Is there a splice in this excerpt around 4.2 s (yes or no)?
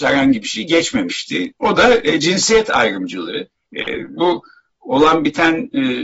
yes